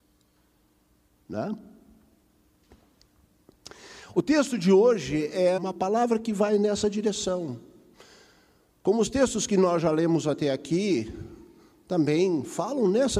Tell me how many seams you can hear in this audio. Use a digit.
1